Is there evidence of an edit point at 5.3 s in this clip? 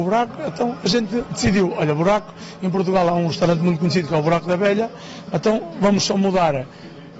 no; 0 cuts

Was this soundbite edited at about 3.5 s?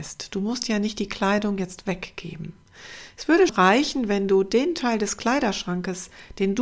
yes; 1 cut; at 3.5 s

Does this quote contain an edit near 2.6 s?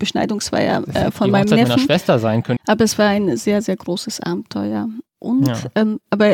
yes; 1 cut; at 2.6 s

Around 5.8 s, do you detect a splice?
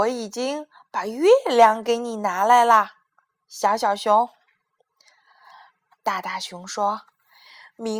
no; 0 cuts

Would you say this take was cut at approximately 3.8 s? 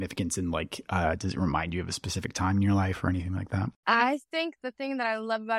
no; 0 cuts

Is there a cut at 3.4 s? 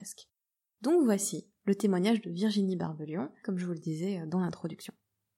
yes; 1 cut; at 3.4 s

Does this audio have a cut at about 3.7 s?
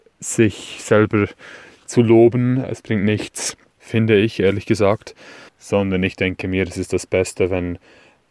yes; 2 cuts; at 3.7 s, 5.5 s

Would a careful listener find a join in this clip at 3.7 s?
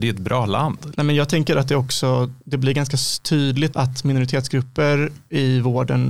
yes; 2 cuts; at 0.9 s, 3.7 s

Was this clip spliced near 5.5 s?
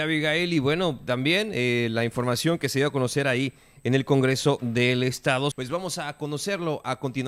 yes; 1 cut; at 5.5 s

